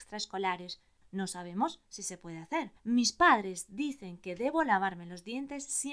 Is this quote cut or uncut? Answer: cut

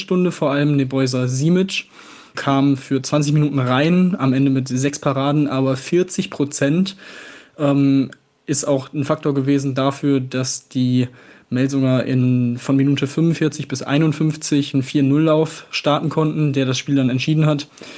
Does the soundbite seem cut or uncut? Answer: cut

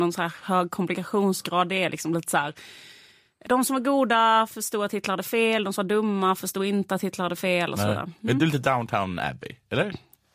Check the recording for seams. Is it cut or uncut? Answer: uncut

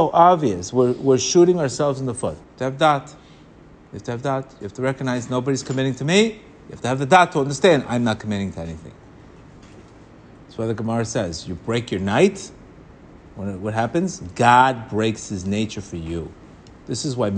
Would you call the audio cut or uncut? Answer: cut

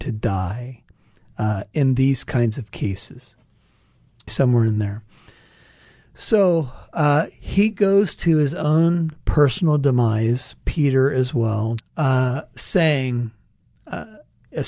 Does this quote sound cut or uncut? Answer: cut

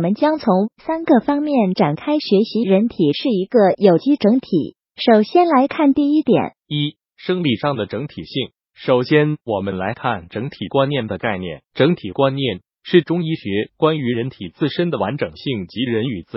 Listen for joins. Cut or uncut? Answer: uncut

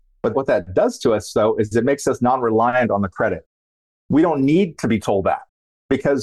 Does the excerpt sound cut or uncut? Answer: uncut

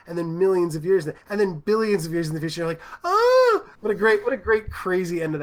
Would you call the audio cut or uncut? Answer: cut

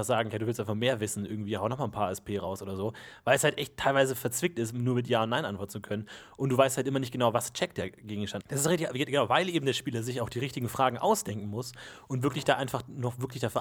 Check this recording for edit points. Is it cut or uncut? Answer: cut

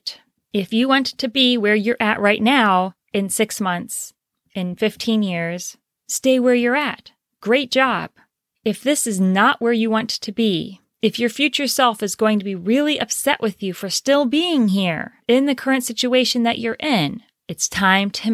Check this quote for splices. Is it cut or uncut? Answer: uncut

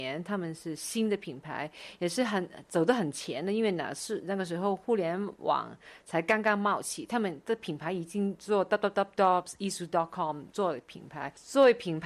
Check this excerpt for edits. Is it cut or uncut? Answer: cut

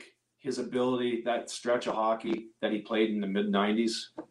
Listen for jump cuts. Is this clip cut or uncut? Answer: uncut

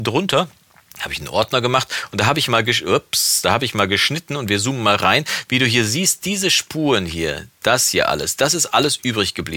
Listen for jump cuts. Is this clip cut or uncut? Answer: uncut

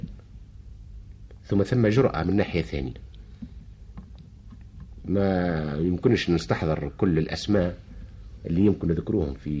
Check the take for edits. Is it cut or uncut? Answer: uncut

